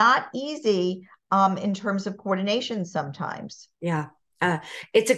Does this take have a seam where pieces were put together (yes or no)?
no